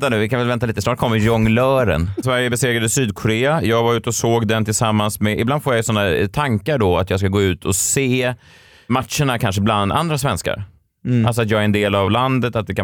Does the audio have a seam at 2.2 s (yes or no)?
yes